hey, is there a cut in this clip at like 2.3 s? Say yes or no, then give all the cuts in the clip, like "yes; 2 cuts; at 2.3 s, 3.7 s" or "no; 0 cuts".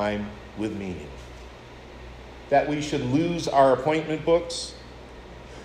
yes; 1 cut; at 2.3 s